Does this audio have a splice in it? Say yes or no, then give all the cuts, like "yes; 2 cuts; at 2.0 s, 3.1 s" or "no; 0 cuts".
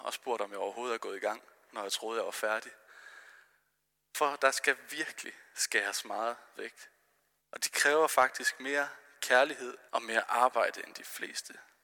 yes; 2 cuts; at 7.4 s, 9.9 s